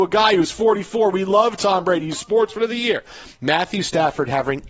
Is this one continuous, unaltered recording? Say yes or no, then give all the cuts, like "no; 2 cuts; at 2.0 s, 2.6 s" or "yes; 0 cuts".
yes; 0 cuts